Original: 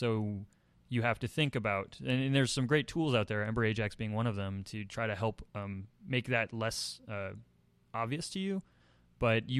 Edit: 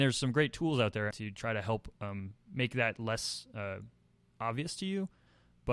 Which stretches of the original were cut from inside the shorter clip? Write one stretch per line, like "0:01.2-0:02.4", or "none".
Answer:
0:03.5-0:04.6